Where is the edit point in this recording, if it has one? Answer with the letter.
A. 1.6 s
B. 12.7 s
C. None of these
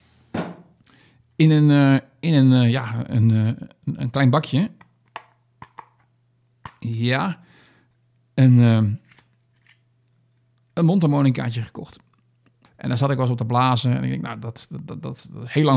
B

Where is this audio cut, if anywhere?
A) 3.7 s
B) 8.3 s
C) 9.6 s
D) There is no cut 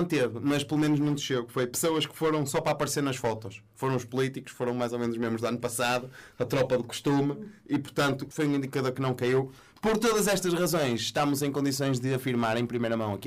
B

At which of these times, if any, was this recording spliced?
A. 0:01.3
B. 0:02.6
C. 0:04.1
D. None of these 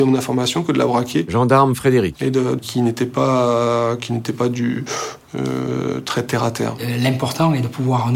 B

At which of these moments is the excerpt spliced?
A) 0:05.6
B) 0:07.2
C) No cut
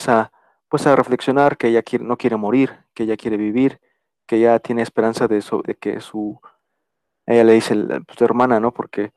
A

